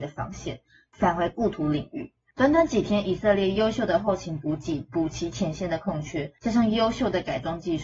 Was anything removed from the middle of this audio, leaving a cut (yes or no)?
yes